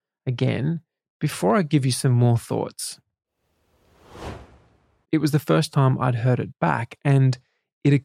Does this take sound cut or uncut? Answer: cut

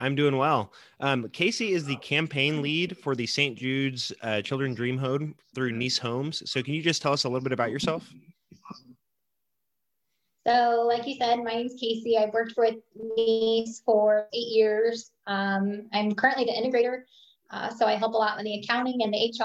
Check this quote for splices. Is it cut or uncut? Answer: uncut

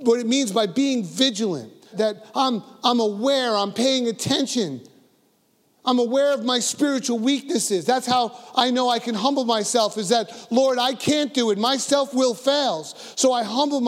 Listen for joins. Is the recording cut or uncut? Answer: cut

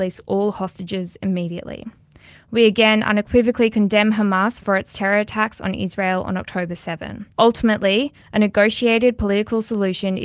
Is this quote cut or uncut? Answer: cut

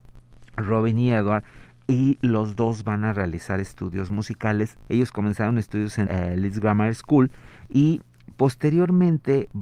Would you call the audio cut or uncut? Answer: cut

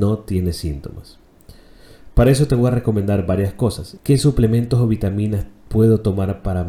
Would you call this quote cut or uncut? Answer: cut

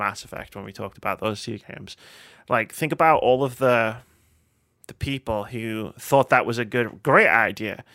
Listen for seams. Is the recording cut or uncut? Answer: uncut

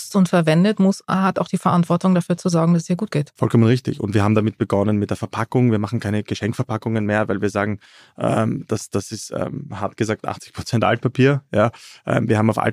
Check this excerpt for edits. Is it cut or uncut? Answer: uncut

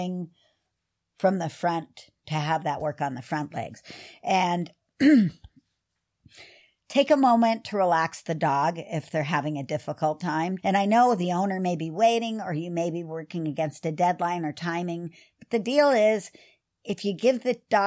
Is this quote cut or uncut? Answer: cut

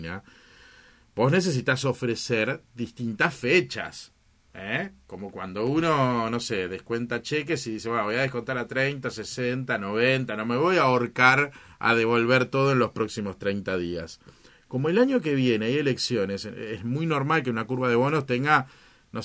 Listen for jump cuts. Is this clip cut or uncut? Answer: uncut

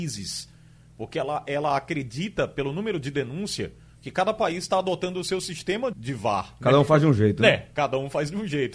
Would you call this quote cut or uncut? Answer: cut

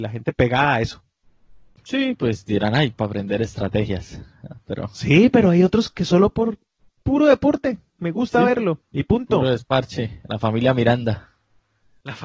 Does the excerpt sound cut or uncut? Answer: uncut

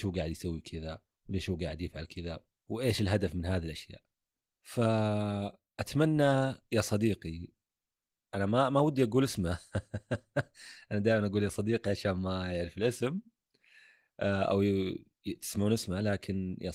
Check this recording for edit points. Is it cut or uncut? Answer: uncut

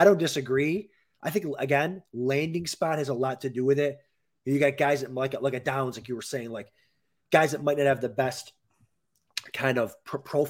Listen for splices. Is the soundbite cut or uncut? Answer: uncut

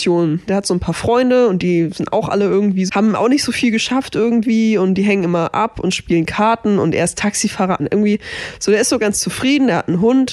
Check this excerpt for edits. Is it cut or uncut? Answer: cut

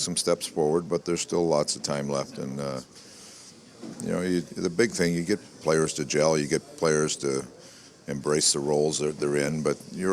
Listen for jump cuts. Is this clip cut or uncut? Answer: uncut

